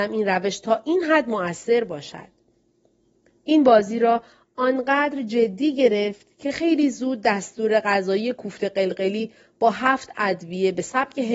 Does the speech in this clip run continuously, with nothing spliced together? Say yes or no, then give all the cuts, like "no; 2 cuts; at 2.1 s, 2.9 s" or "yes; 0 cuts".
yes; 0 cuts